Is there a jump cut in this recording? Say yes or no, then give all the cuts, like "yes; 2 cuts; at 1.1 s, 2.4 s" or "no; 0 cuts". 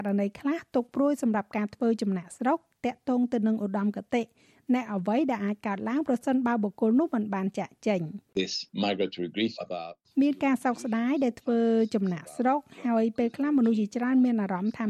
yes; 1 cut; at 8.3 s